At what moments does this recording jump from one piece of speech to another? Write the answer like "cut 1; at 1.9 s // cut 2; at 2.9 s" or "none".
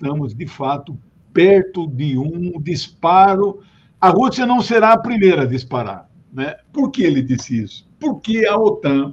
cut 1; at 6.7 s